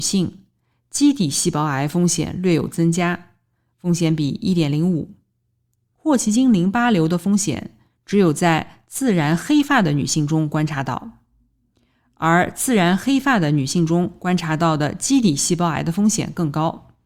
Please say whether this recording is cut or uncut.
cut